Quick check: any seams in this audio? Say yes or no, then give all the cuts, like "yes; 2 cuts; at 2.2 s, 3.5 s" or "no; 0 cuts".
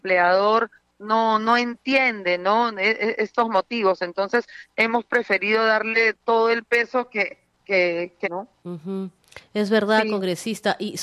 yes; 1 cut; at 8.2 s